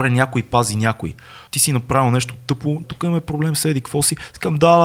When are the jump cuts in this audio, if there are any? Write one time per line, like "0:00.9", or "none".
0:01.5
0:02.8